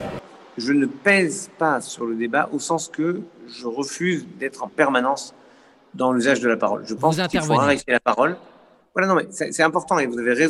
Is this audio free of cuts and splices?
yes; 0 cuts

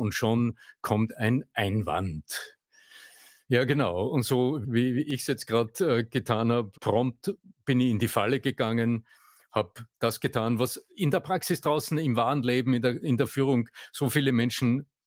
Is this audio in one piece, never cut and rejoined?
no; 2 cuts; at 6.7 s, 13.0 s

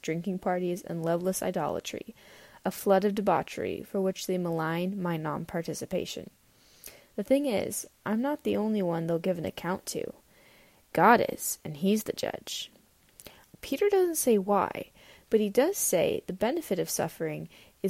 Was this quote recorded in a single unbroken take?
no; 1 cut; at 13.5 s

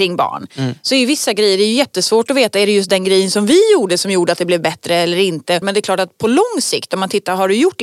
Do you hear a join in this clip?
yes; 1 cut; at 5.6 s

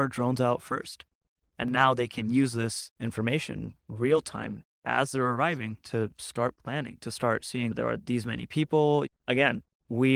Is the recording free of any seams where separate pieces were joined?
no; 2 cuts; at 1.4 s, 9.1 s

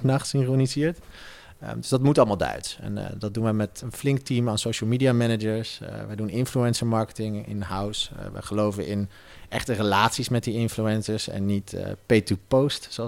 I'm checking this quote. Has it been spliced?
yes; 1 cut; at 3.8 s

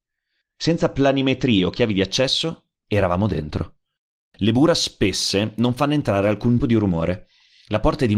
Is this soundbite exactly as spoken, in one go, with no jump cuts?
no; 1 cut; at 6.6 s

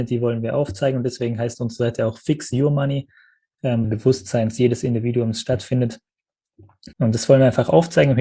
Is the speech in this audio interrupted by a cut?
yes; 2 cuts; at 3.8 s, 6.9 s

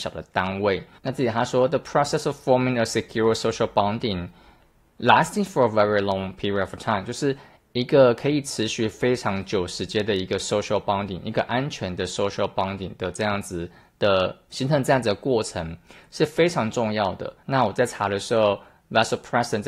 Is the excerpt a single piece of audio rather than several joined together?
no; 2 cuts; at 1.0 s, 17.4 s

